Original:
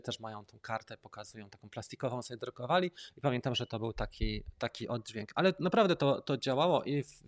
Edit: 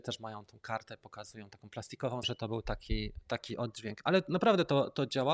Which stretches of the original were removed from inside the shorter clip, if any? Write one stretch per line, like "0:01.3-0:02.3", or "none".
0:02.2-0:03.5